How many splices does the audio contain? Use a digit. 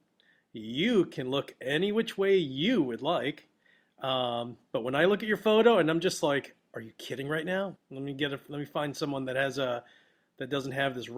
1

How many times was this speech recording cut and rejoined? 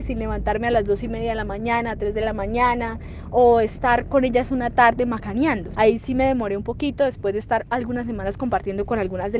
1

